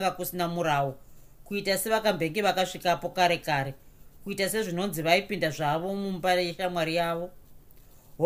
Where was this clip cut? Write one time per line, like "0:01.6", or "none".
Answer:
none

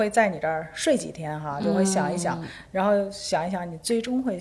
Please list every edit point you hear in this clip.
none

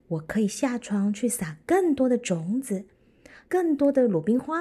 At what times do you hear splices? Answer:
0:03.4

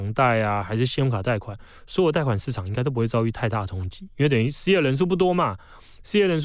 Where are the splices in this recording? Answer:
none

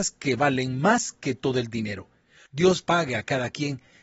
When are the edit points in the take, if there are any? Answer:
0:02.5

